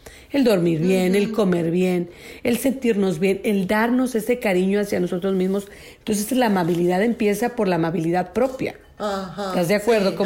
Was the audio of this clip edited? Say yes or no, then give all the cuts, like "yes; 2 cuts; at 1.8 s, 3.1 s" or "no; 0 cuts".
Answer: no; 0 cuts